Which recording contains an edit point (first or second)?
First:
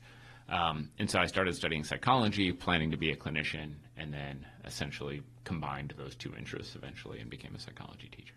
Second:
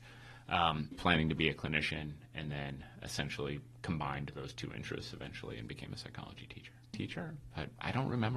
second